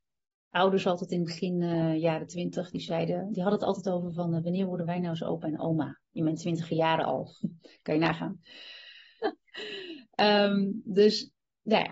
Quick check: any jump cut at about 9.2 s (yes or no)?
yes